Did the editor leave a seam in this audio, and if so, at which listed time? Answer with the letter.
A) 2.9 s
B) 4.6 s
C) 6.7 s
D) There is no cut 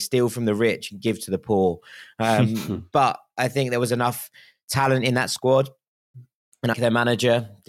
C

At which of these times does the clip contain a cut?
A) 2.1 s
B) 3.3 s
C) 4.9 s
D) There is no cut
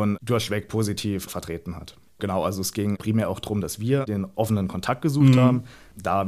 A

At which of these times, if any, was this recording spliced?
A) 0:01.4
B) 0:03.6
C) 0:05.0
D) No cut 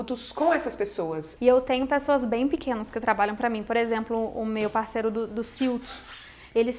A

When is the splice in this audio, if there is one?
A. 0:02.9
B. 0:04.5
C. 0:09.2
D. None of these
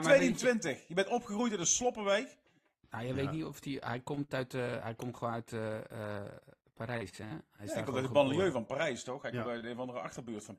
A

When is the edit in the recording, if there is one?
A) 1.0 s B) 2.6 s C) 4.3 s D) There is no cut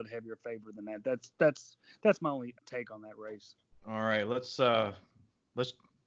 B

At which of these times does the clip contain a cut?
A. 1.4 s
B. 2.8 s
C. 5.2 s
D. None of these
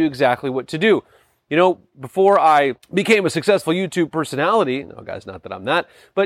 B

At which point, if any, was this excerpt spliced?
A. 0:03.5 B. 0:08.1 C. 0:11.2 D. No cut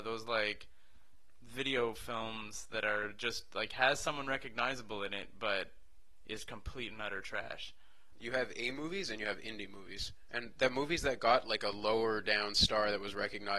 B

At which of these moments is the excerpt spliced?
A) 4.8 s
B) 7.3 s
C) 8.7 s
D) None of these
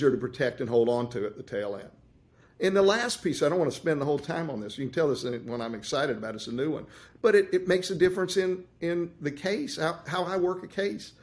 D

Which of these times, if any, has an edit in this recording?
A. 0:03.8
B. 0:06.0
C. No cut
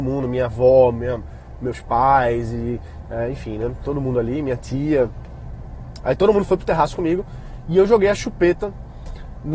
B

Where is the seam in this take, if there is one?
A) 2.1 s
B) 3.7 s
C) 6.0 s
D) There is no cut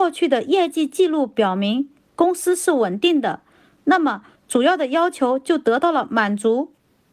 D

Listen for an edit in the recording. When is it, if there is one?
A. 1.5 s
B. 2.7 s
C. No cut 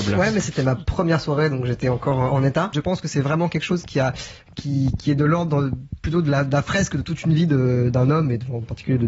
B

